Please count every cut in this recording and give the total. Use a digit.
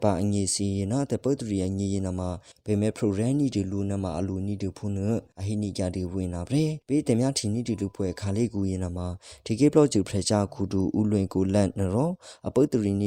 1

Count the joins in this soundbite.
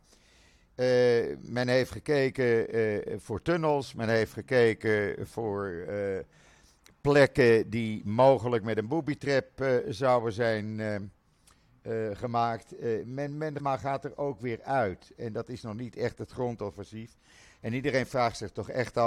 1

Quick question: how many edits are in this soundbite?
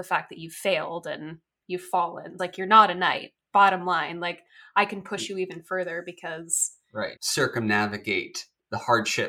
2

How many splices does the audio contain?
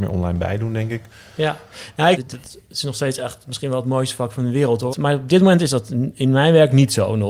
2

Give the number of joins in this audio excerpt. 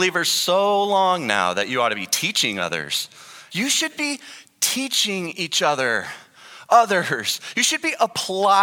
1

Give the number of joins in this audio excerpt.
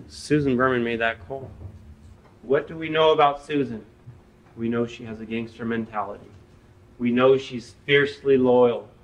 1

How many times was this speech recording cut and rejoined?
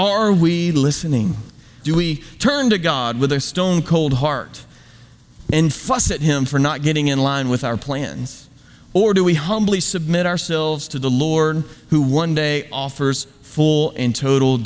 1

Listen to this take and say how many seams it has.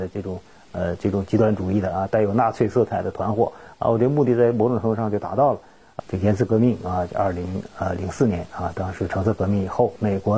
1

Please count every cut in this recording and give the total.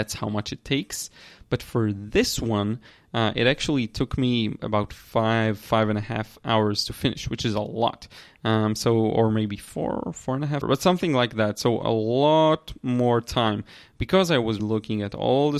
2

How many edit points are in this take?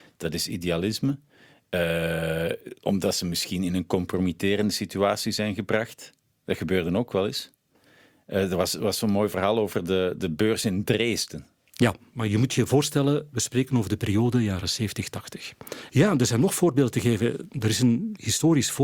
1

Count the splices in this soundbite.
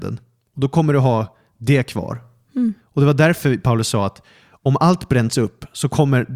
1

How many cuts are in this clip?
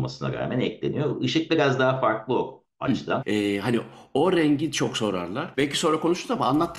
2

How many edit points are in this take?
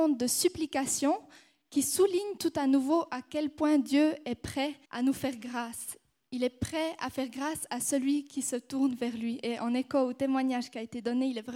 1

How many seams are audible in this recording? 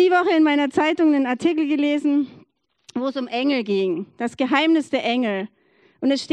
0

